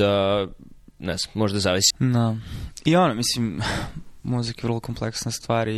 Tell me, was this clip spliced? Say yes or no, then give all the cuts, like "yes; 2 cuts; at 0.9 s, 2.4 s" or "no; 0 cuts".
yes; 1 cut; at 1.9 s